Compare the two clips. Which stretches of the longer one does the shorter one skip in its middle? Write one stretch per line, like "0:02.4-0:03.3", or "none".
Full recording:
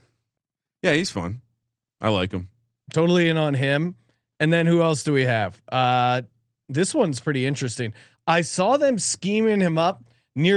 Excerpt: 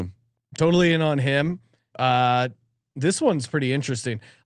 0:04.3-0:05.6